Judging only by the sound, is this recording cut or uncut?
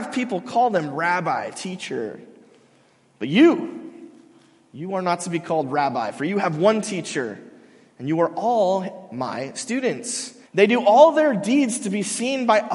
cut